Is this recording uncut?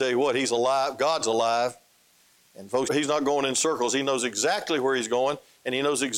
no; 1 cut; at 2.8 s

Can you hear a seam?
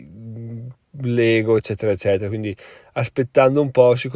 no; 0 cuts

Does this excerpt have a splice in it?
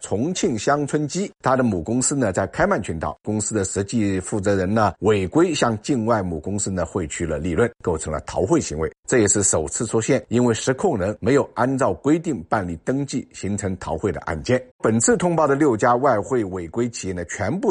yes; 1 cut; at 14.7 s

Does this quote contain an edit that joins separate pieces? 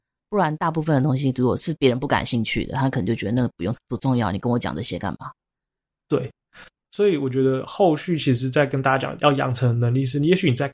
no; 0 cuts

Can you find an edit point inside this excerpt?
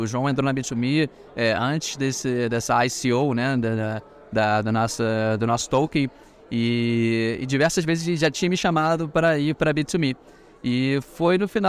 no; 0 cuts

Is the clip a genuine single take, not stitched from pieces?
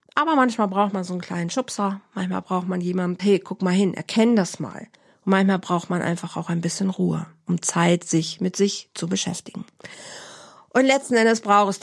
no; 1 cut; at 3.2 s

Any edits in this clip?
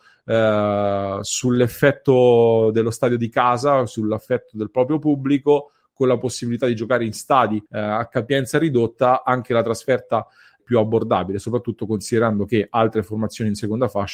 yes; 2 cuts; at 7.7 s, 10.6 s

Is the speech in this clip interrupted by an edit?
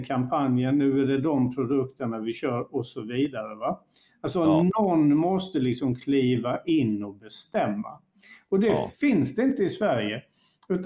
no; 0 cuts

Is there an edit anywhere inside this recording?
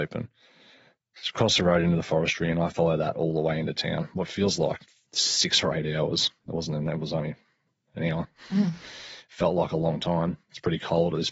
no; 0 cuts

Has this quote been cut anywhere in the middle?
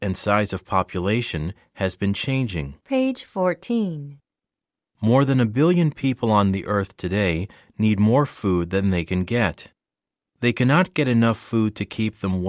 yes; 2 cuts; at 2.8 s, 4.8 s

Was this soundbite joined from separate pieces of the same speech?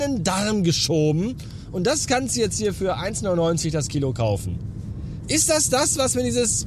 no; 0 cuts

